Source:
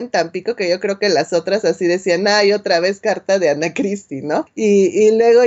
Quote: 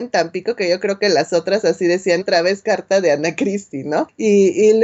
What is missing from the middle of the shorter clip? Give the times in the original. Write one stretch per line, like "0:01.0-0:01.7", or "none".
0:02.2-0:02.6